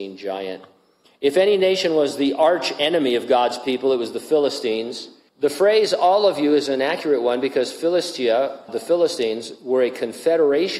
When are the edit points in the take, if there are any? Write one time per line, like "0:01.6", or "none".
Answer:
0:01.1
0:05.3
0:08.7